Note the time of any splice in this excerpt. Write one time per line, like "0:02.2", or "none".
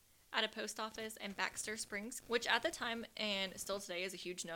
0:02.2